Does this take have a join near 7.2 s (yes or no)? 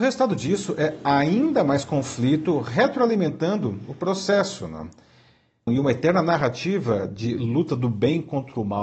no